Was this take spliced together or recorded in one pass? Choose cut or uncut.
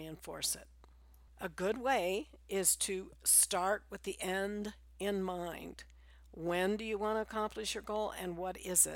cut